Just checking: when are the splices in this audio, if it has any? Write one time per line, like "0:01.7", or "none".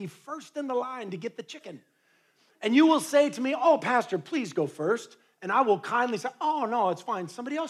none